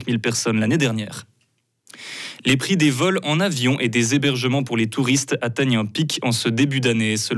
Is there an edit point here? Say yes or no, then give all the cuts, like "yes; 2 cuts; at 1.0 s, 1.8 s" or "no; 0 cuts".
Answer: no; 0 cuts